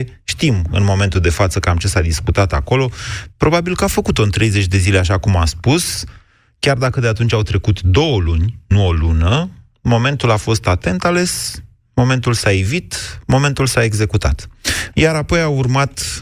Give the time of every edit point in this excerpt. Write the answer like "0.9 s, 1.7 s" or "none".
3.3 s, 14.9 s